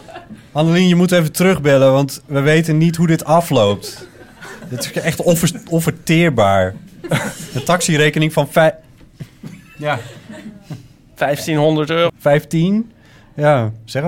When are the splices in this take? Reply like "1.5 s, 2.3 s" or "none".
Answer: 12.1 s